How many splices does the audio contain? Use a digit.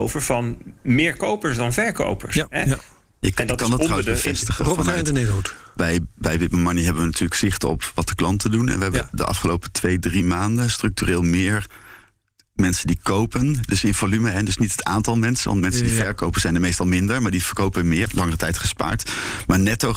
1